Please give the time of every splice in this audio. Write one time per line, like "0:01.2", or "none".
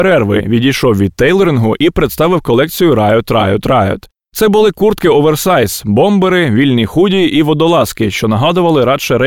none